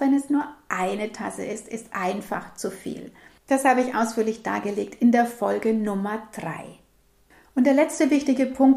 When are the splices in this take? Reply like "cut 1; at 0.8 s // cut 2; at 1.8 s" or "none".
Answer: cut 1; at 1.9 s